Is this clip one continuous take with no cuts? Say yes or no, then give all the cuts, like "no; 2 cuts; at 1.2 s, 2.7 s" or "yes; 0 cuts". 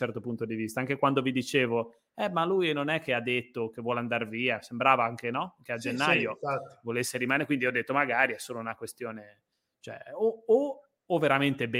yes; 0 cuts